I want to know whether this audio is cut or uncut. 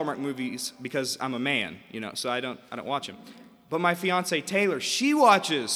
uncut